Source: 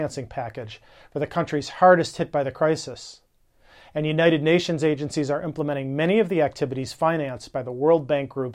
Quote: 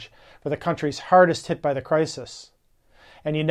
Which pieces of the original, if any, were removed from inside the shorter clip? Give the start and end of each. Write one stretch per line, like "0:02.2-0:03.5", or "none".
none